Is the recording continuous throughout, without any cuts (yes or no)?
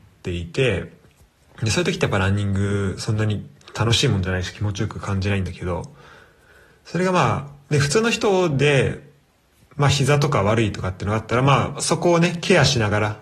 yes